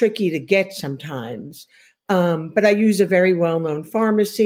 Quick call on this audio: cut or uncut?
uncut